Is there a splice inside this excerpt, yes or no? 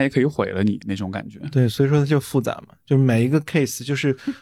no